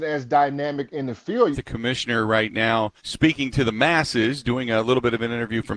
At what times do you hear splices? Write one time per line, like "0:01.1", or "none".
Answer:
0:01.5
0:03.0